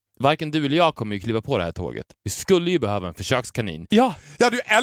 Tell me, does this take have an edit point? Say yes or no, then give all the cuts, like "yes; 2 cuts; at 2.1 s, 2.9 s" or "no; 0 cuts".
yes; 1 cut; at 3.9 s